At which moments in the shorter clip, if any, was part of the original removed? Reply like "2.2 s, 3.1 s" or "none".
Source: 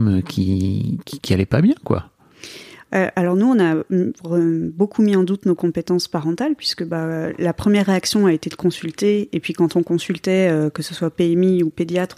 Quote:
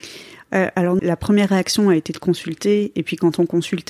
1.0 s

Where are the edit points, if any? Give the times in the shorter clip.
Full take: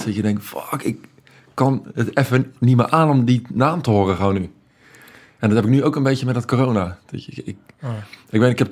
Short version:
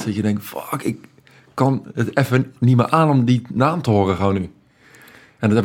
none

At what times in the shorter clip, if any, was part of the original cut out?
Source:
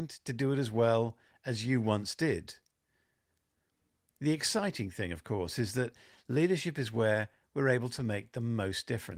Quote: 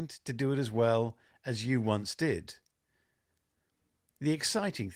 none

